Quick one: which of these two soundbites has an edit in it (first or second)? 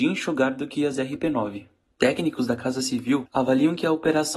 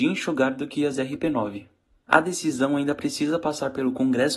first